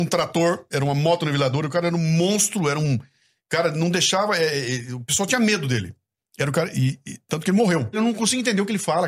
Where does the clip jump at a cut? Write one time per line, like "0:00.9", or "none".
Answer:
0:07.9